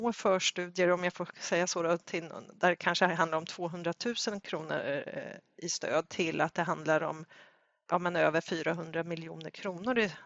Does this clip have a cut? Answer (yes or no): no